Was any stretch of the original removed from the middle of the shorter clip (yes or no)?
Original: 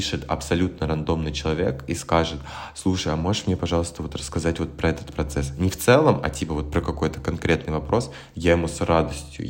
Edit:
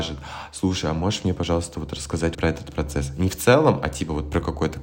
yes